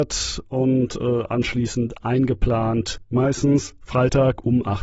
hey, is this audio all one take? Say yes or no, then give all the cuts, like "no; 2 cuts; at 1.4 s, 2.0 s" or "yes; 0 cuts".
no; 1 cut; at 3.1 s